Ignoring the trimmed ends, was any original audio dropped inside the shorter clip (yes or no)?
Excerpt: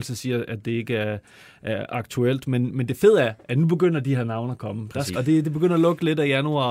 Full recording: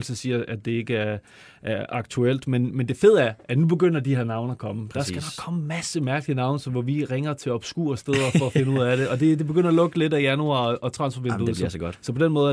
yes